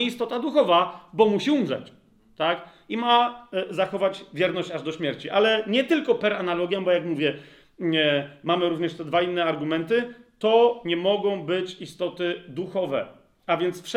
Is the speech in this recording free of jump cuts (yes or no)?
yes